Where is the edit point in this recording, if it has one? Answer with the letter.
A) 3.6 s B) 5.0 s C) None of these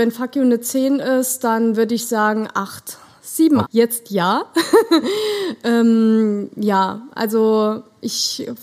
A